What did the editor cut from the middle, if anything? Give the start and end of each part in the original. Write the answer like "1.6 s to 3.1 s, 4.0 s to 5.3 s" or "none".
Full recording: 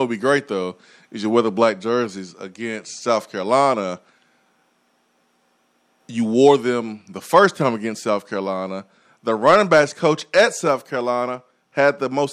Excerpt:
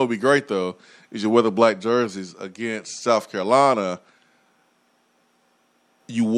none